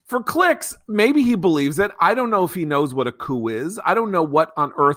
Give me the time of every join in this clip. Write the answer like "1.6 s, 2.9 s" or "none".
none